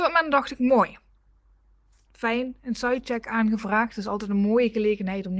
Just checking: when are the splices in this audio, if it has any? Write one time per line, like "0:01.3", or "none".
none